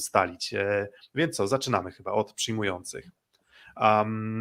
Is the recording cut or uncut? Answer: uncut